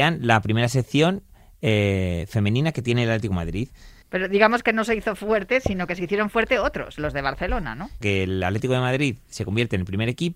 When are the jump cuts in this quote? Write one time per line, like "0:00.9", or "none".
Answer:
0:04.0
0:08.0

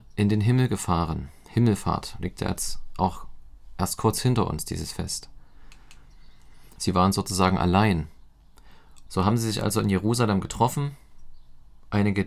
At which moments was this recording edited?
0:06.8
0:09.1

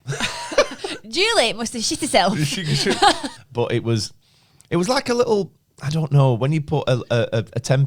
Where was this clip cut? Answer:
0:03.4

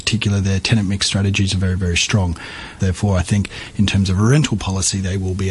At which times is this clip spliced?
0:02.8

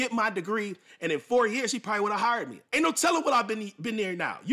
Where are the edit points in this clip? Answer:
0:02.6

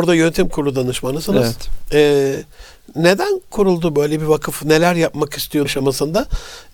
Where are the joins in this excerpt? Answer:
0:05.7

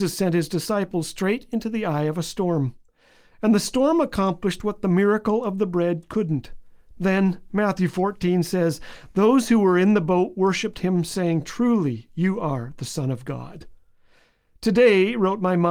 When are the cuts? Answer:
0:06.9

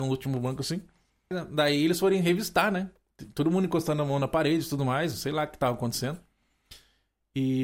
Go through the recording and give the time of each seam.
0:01.3

